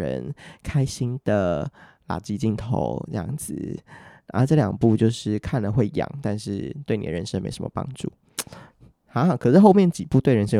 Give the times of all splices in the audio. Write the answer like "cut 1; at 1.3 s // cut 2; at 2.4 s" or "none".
none